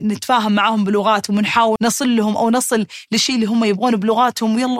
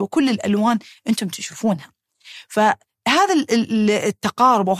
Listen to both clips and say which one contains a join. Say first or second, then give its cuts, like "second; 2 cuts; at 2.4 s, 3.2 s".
first; 1 cut; at 1.8 s